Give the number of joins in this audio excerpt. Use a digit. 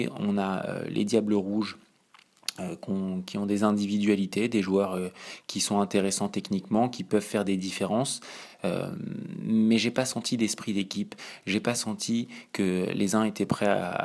0